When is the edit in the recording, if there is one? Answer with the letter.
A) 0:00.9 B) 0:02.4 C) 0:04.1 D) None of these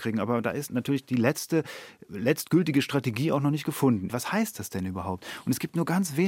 C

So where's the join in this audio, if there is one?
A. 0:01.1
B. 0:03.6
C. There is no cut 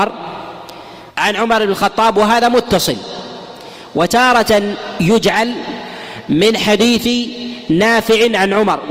A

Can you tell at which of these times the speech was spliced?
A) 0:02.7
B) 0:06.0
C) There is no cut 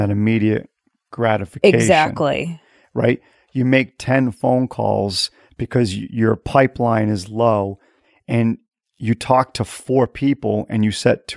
C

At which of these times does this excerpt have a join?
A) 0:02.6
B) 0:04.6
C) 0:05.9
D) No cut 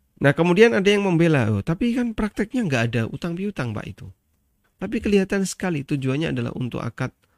B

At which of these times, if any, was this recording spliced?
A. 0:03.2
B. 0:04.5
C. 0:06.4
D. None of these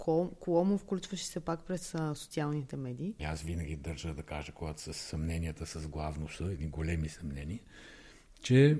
A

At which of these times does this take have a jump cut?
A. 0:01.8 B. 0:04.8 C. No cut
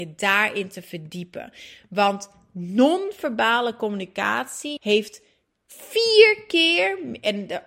B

